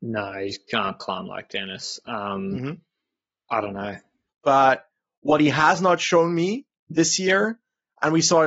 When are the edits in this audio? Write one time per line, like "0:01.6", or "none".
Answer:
0:04.3
0:06.7